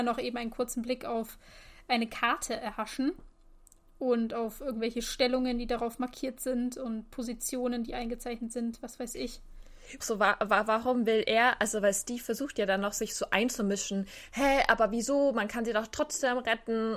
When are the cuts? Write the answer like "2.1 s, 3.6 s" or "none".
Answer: 10.0 s